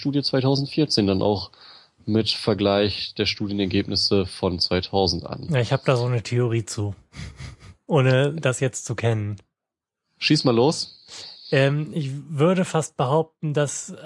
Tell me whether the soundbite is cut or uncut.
uncut